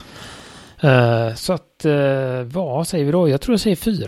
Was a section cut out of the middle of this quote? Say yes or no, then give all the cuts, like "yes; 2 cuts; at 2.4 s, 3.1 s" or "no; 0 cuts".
no; 0 cuts